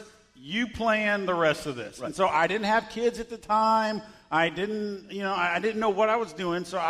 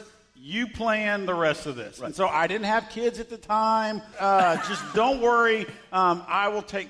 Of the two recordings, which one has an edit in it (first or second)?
second